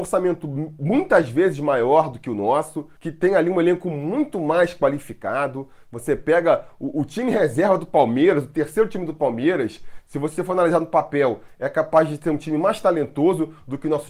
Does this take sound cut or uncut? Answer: uncut